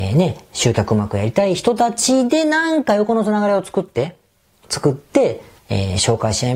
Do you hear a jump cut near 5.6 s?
yes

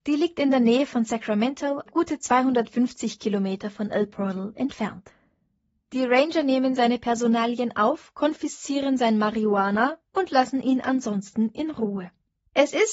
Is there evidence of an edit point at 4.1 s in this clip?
no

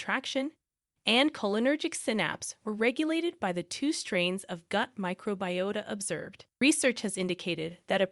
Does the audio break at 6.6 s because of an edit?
yes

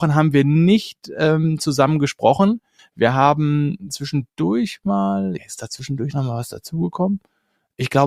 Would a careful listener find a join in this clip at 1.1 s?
no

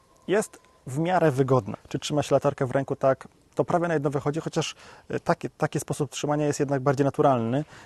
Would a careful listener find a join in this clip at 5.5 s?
no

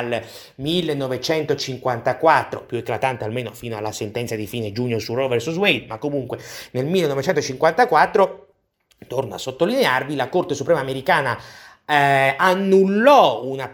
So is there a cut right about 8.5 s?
no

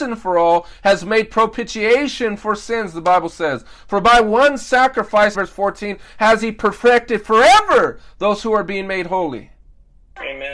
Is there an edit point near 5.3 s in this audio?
yes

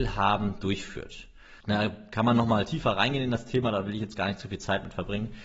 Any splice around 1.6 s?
yes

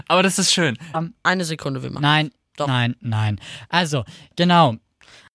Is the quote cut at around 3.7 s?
no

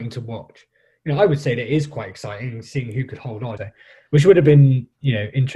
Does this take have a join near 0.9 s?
no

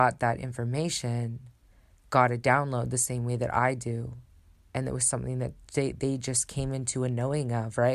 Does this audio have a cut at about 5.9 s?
no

